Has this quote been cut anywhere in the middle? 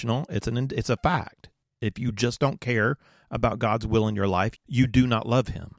yes; 1 cut; at 4.6 s

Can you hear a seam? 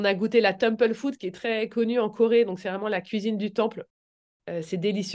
no; 0 cuts

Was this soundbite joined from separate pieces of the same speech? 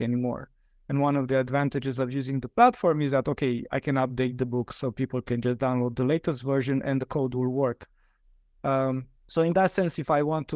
yes; 1 cut; at 9.2 s

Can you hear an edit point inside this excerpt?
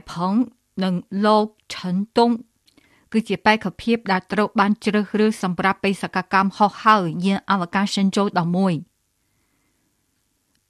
no; 0 cuts

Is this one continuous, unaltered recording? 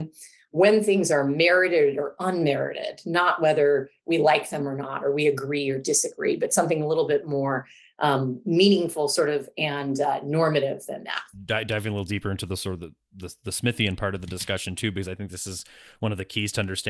yes; 0 cuts

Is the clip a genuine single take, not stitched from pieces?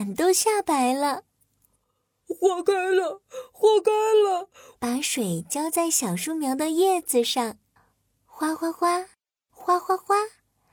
no; 1 cut; at 4.7 s

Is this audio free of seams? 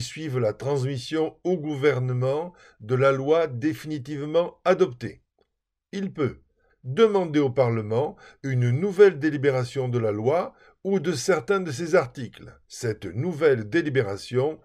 no; 2 cuts; at 6.7 s, 12.6 s

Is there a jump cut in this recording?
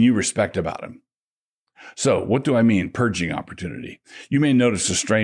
no; 0 cuts

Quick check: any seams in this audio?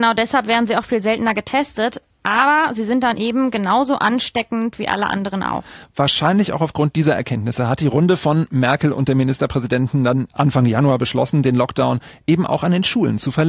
yes; 1 cut; at 10.3 s

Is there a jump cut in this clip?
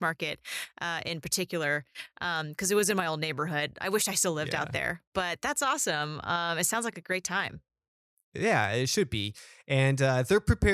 no; 0 cuts

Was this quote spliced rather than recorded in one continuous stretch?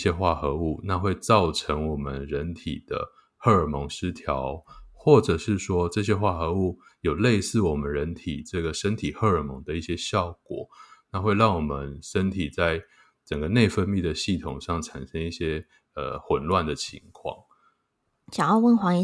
no; 0 cuts

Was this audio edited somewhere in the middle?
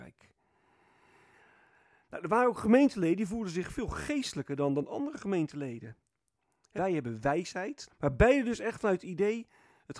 yes; 2 cuts; at 6.8 s, 7.9 s

